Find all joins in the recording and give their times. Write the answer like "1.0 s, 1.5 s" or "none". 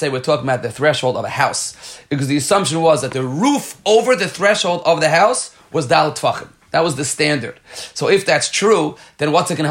none